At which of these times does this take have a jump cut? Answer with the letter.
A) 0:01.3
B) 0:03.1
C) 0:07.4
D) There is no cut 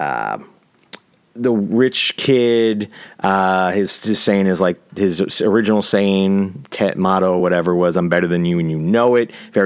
D